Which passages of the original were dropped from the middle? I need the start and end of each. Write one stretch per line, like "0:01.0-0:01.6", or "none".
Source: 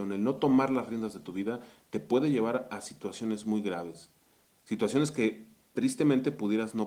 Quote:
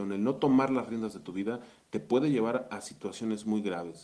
none